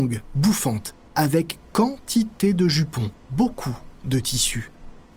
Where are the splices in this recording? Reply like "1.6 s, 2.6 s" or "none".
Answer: 3.3 s